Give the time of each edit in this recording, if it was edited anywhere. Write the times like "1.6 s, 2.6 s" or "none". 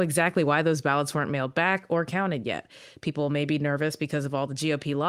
none